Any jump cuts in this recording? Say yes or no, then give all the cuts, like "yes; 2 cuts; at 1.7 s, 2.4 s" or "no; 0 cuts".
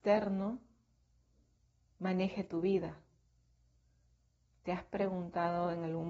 no; 0 cuts